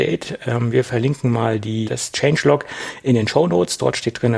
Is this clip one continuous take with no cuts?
no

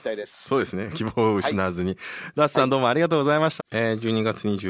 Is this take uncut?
no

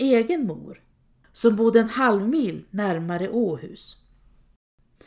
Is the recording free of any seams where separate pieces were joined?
no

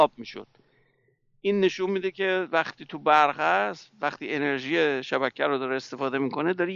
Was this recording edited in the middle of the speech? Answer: no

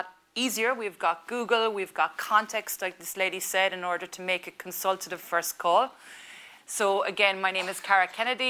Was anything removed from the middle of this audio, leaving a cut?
yes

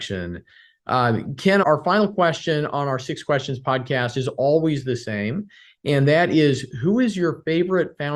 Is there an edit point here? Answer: yes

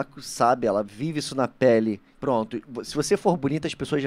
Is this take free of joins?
no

